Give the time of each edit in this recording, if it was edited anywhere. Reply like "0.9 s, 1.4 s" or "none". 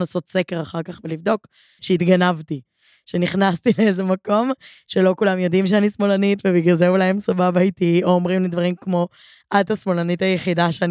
1.8 s